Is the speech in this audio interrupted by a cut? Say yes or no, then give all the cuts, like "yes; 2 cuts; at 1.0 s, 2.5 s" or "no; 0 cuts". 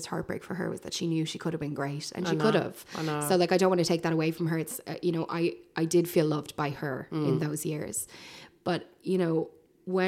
no; 0 cuts